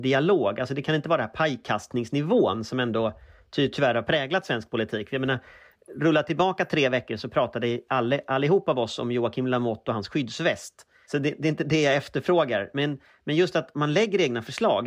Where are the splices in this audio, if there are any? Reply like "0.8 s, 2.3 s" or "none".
11.0 s